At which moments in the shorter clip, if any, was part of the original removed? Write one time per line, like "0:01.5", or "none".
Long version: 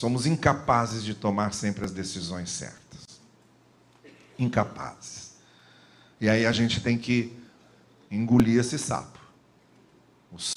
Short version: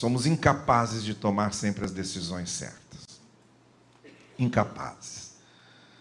none